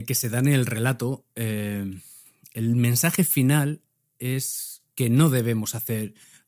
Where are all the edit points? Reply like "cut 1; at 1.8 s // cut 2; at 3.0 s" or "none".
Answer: cut 1; at 4.9 s